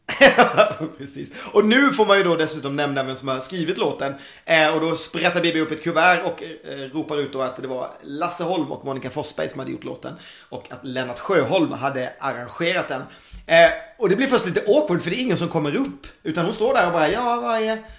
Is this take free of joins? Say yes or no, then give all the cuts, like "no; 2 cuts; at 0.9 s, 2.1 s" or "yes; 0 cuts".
yes; 0 cuts